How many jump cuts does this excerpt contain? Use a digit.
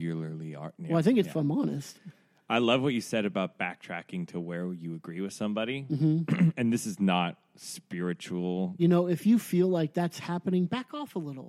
2